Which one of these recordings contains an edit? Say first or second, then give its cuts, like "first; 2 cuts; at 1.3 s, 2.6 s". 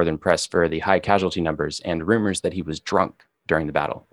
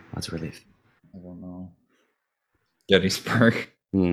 second; 1 cut; at 1.0 s